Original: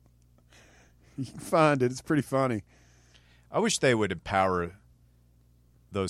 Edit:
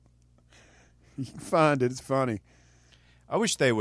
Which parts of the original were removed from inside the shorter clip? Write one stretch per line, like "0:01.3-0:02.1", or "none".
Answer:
0:02.0-0:02.2